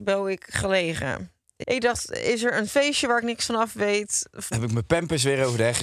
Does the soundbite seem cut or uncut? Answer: cut